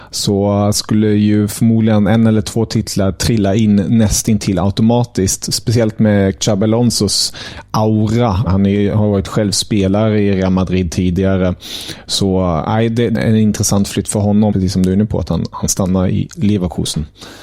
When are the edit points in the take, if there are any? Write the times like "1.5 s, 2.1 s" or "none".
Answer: 8.5 s, 13.1 s, 14.5 s